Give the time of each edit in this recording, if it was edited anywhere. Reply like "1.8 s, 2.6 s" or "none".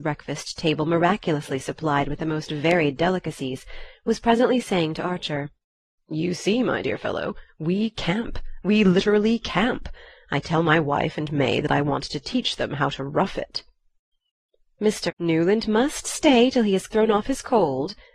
15.1 s, 16.9 s